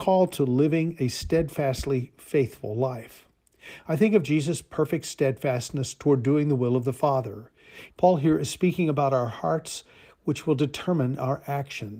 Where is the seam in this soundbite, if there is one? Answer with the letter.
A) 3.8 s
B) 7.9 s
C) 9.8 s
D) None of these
B